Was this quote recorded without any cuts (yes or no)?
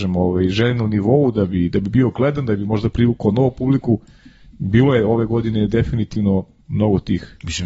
yes